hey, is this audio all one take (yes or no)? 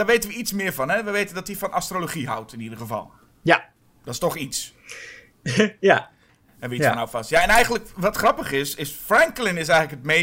yes